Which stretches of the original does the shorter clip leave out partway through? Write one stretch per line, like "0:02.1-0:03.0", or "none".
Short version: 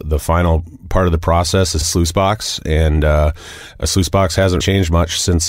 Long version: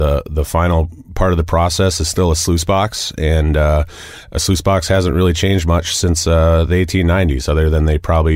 0:02.1-0:02.3
0:05.1-0:05.4